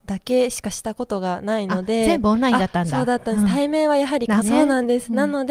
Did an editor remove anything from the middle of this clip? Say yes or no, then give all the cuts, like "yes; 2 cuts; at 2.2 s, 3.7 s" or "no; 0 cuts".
yes; 1 cut; at 4.4 s